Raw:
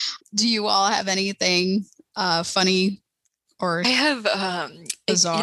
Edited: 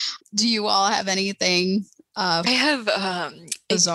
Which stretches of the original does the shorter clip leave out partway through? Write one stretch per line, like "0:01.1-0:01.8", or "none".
0:02.4-0:03.8